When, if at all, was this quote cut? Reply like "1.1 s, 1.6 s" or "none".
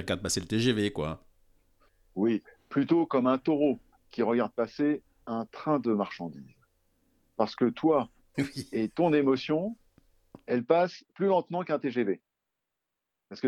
8.3 s, 11.1 s